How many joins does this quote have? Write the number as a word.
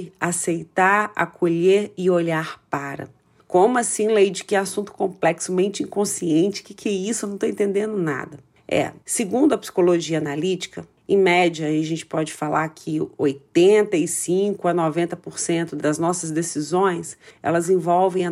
zero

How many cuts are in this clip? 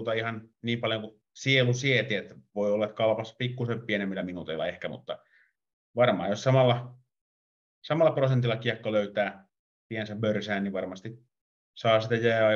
zero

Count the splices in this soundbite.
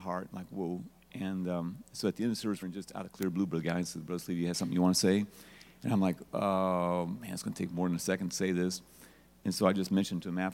one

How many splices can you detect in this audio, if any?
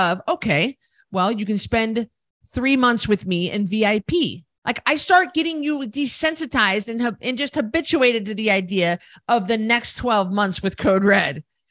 one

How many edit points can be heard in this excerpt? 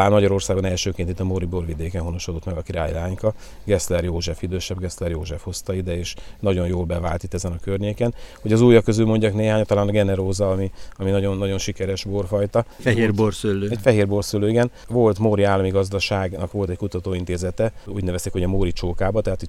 zero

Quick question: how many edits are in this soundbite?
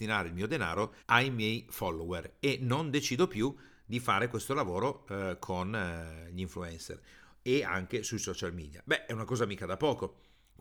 one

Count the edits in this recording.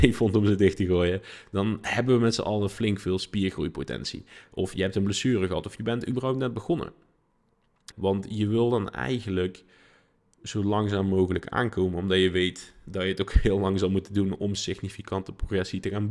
one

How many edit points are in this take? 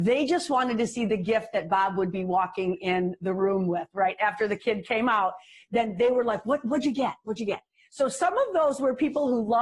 zero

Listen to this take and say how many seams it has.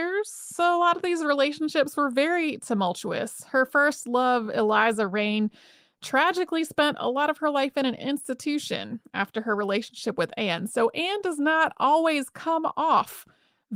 zero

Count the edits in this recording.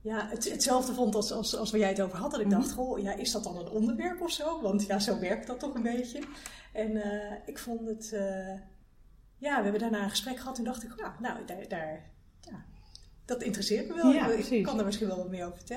zero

